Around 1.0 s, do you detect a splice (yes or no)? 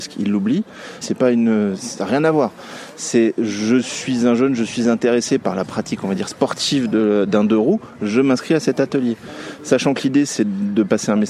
yes